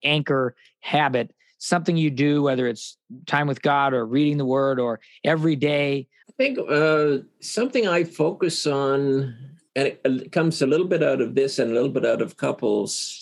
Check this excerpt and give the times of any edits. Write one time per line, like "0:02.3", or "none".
0:06.2
0:09.7